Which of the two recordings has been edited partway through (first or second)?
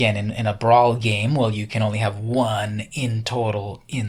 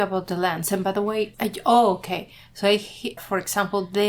second